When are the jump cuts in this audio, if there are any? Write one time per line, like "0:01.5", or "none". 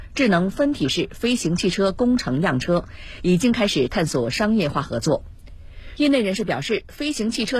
0:06.0